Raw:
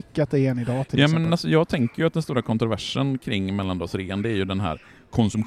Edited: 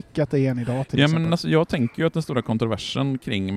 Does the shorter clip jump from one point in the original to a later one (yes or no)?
no